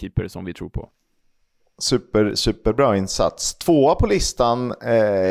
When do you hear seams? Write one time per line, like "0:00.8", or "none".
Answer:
0:01.8